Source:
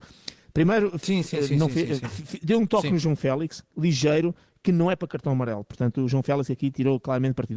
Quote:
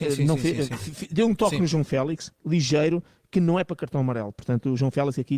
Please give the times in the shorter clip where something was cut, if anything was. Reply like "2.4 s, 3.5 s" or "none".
none